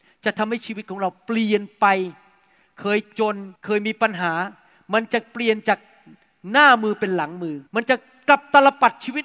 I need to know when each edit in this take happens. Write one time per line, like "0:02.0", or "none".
0:03.6
0:07.7